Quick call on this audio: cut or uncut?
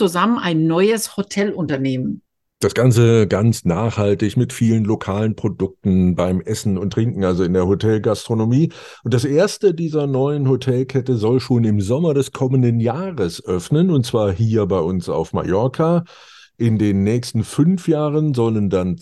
uncut